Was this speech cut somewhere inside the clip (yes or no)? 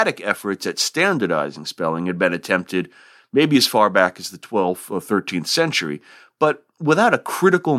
no